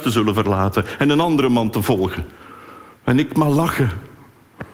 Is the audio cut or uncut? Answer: uncut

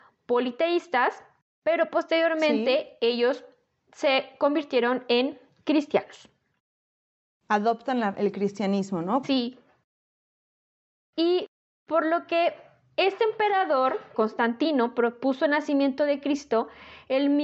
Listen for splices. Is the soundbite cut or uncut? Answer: cut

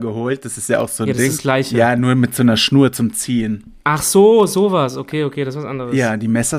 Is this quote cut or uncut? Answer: uncut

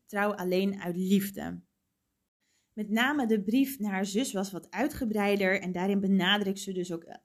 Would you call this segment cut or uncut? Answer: uncut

